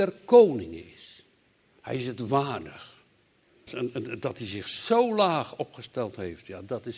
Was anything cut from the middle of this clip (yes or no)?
yes